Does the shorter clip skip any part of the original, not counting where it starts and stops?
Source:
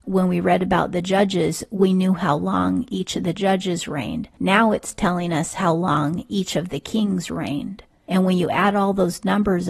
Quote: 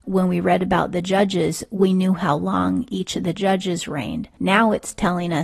no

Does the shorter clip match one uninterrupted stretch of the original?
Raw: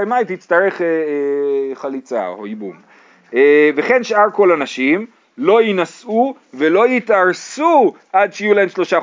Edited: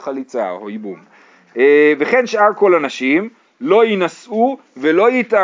yes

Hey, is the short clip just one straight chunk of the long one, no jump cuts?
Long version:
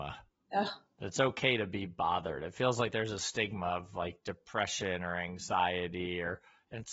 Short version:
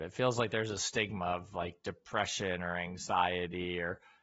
yes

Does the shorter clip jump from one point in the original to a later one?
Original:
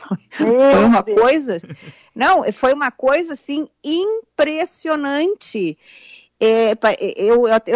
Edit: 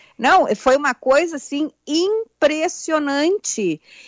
no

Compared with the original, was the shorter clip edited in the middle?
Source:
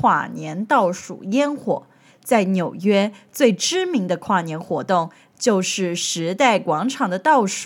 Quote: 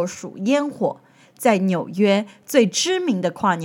no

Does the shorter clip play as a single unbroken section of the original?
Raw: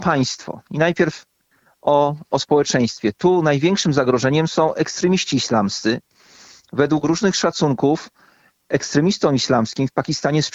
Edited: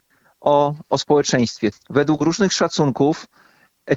no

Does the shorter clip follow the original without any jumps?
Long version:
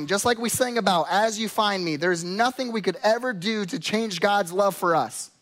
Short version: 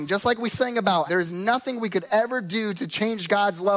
no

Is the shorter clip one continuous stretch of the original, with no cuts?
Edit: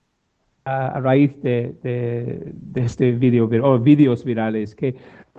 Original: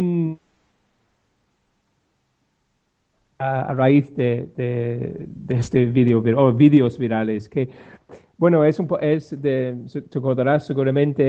yes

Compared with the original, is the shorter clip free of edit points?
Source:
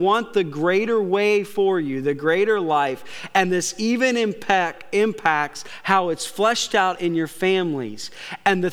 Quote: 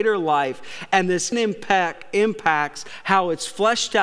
no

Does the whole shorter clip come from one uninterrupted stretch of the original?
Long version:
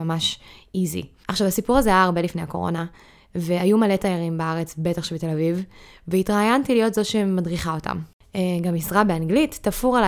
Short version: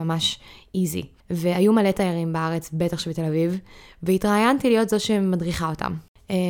no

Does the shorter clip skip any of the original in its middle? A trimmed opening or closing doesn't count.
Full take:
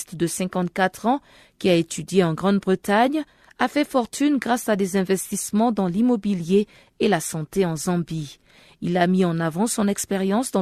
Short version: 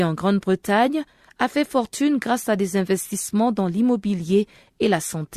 no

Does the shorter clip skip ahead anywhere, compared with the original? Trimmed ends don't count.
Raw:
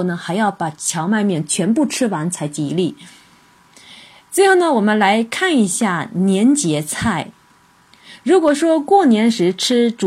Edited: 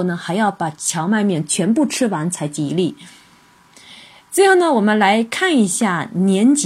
no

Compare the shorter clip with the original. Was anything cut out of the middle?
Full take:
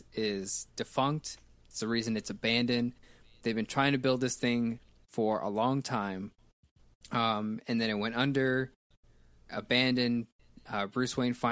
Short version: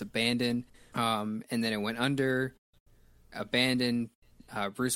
yes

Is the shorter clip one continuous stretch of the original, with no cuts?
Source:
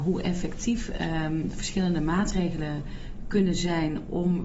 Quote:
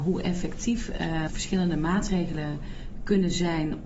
no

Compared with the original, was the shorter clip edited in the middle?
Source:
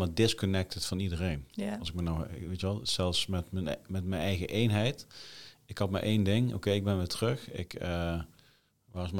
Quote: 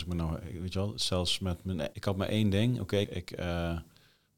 yes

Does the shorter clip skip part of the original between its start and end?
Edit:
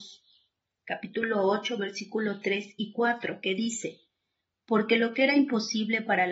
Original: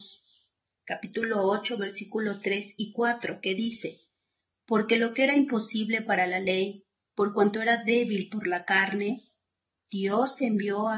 no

